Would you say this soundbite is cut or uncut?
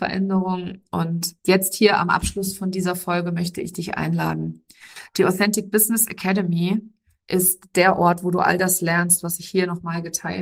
uncut